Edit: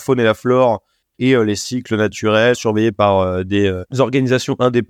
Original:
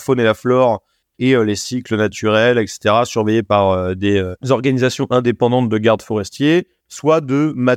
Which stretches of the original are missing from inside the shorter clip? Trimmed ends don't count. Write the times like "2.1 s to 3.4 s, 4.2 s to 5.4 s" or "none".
2.5 s to 3.0 s